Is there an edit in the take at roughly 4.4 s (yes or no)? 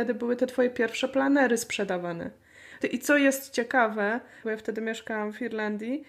yes